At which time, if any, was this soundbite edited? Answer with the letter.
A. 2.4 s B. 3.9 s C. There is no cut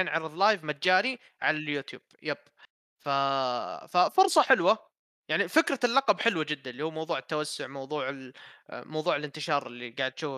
C